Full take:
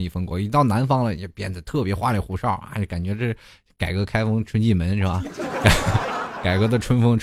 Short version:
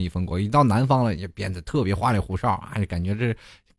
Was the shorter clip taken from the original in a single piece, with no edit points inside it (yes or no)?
yes